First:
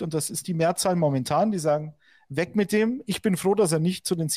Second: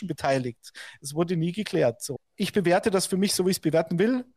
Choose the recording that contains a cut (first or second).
second